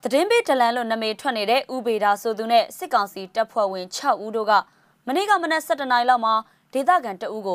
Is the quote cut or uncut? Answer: uncut